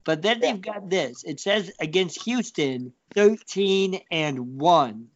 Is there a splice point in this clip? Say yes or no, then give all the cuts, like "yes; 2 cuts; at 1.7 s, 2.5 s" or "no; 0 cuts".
yes; 1 cut; at 3.1 s